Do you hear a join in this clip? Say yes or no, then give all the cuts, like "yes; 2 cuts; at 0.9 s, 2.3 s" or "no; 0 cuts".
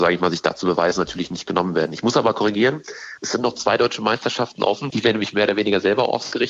yes; 1 cut; at 4.9 s